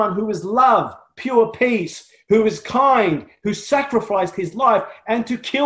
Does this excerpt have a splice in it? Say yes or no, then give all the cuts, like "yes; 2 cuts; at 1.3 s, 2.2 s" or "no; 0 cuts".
no; 0 cuts